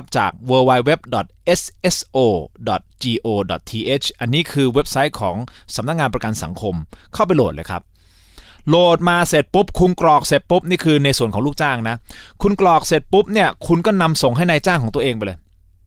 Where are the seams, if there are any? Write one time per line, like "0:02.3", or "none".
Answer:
none